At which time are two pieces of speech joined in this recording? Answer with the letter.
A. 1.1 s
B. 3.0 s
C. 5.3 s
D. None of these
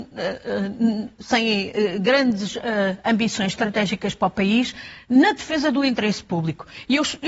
D